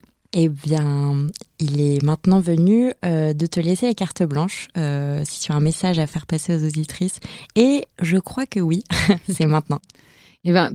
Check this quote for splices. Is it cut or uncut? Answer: uncut